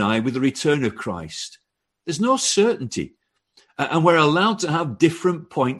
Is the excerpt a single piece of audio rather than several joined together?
yes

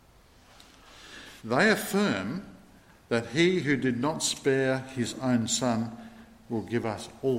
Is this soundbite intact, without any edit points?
no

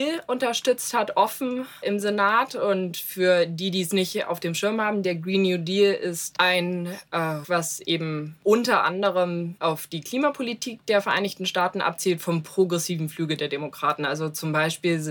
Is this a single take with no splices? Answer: no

